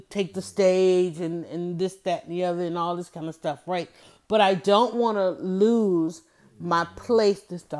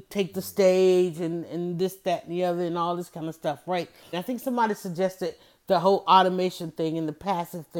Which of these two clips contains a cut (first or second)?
second